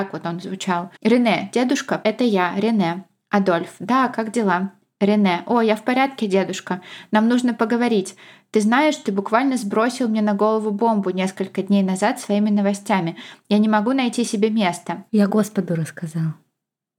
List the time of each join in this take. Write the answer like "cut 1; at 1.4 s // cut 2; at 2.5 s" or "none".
cut 1; at 1.0 s // cut 2; at 2.0 s // cut 3; at 15.1 s